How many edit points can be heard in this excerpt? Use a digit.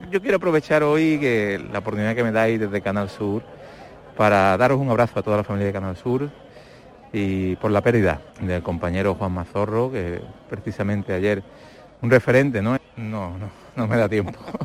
2